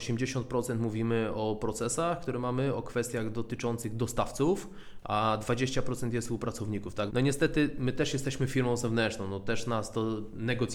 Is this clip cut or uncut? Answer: cut